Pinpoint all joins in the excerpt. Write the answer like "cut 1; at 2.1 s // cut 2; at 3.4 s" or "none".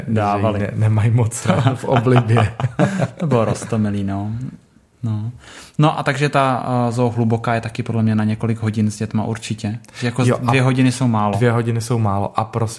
none